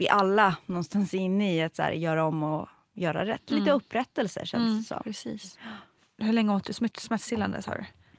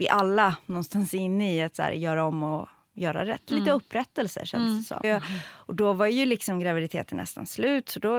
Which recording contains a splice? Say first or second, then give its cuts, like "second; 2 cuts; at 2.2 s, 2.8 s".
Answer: second; 1 cut; at 5.0 s